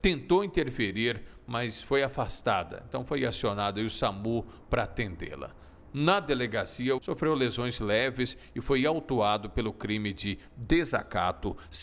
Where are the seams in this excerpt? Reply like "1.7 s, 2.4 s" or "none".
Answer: 7.0 s